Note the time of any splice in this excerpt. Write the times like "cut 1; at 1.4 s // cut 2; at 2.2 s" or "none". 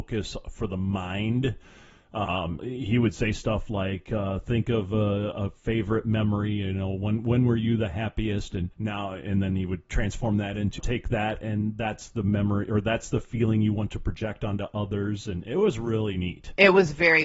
cut 1; at 2.6 s // cut 2; at 8.7 s // cut 3; at 10.8 s